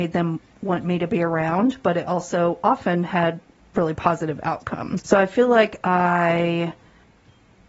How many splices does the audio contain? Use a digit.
1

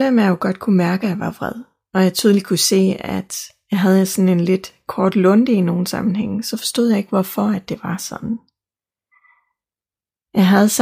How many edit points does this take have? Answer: 0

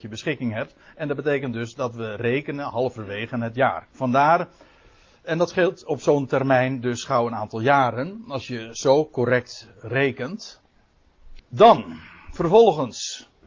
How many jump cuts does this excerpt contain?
2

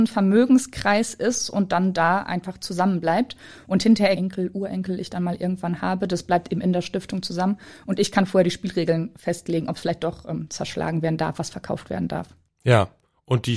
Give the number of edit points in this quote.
1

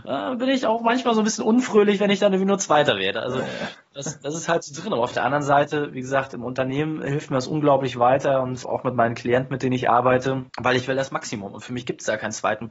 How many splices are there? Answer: 2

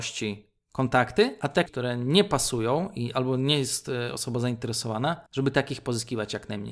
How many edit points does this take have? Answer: 2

